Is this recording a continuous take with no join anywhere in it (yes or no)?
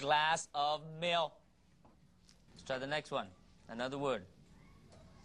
no